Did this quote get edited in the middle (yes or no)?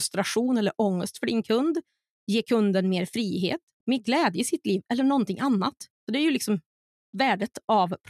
yes